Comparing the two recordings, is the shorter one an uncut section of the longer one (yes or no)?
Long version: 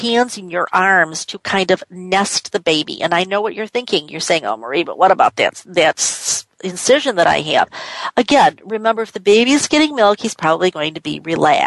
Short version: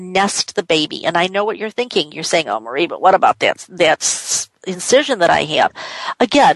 yes